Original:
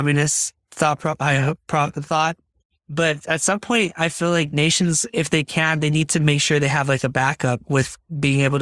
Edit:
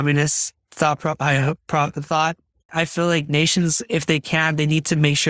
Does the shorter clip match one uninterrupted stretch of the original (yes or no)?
no